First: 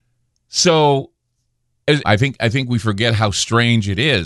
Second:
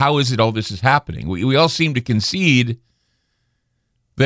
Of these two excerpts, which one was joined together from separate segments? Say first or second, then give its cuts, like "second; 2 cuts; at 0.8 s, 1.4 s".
first; 1 cut; at 2.0 s